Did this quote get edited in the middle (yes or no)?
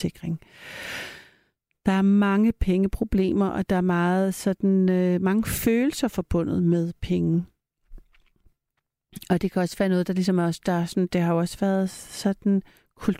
no